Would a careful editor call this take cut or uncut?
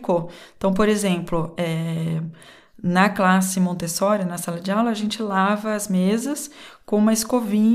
uncut